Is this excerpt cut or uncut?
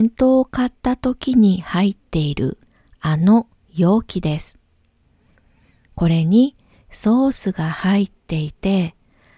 uncut